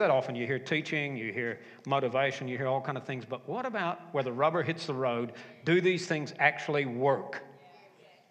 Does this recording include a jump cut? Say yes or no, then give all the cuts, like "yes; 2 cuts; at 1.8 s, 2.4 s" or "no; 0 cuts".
no; 0 cuts